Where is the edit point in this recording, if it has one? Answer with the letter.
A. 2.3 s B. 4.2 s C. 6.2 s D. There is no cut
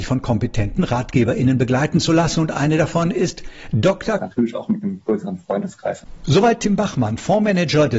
B